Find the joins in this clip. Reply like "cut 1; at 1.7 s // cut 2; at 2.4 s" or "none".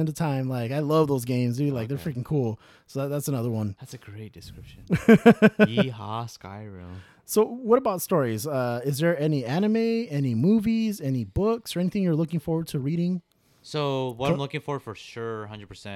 none